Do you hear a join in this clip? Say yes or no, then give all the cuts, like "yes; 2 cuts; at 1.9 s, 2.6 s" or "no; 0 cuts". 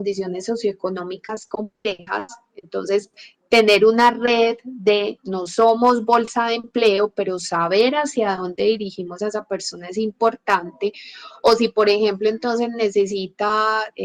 no; 0 cuts